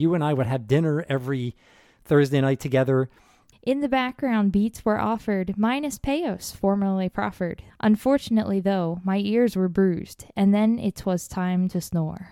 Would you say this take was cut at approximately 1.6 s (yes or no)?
no